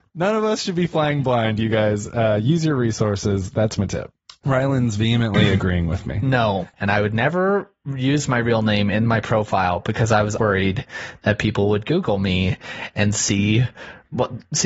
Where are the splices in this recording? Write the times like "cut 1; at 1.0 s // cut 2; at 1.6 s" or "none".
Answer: cut 1; at 6.7 s // cut 2; at 10.4 s